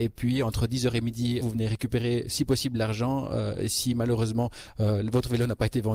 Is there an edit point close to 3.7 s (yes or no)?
no